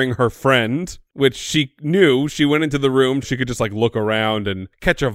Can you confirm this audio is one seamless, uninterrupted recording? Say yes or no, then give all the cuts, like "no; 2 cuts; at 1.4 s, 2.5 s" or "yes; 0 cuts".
no; 1 cut; at 3.2 s